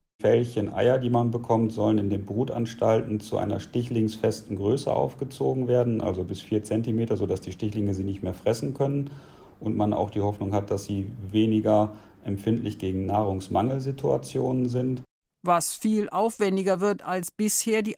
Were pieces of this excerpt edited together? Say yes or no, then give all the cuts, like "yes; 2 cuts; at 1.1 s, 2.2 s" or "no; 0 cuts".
no; 0 cuts